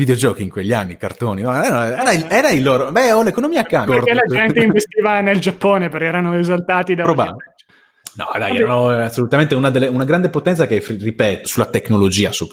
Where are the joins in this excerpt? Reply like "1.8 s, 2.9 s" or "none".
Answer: 3.9 s, 11.4 s